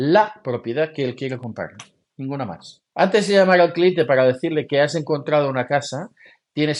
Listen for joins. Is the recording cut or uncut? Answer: uncut